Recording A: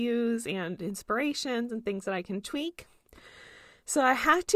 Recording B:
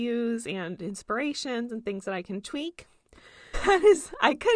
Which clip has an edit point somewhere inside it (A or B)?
B